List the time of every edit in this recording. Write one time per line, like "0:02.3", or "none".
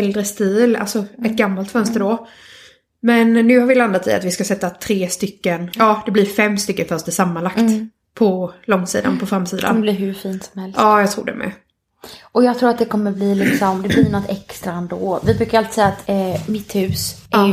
none